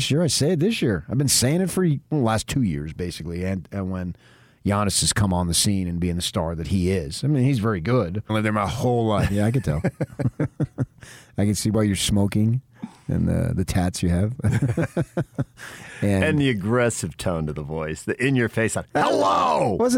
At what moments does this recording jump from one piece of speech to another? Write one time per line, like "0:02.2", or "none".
0:02.0
0:08.3